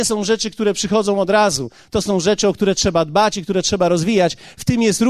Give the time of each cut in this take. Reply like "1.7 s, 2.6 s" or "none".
none